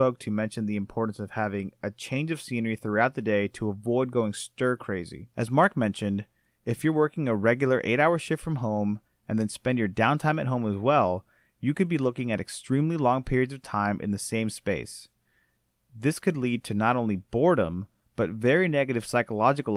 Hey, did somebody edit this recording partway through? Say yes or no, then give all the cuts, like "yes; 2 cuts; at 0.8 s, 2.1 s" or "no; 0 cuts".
no; 0 cuts